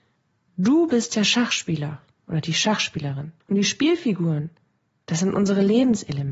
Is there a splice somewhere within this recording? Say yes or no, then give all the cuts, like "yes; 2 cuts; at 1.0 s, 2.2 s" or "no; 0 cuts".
yes; 1 cut; at 3.4 s